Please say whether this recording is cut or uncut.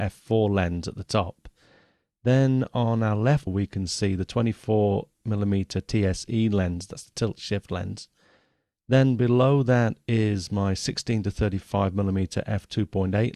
cut